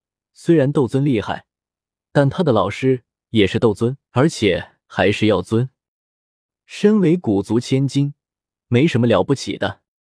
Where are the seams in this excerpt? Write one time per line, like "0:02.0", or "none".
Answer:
0:04.1
0:06.6
0:08.6